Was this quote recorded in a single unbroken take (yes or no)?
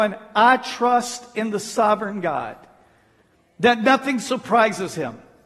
yes